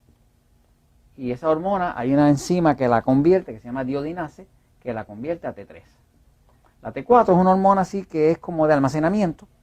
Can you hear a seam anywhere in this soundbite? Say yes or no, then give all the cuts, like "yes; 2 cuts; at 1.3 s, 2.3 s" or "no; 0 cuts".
no; 0 cuts